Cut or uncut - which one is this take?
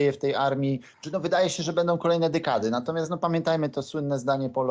cut